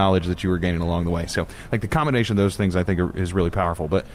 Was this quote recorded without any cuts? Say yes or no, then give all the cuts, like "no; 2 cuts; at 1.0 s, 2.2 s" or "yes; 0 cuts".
yes; 0 cuts